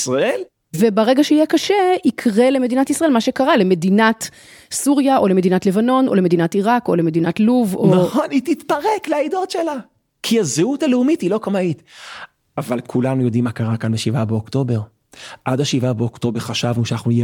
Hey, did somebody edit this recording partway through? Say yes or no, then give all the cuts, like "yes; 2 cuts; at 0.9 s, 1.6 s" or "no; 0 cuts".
no; 0 cuts